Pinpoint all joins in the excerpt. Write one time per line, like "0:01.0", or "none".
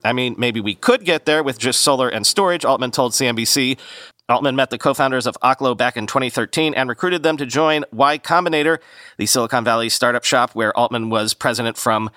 0:04.1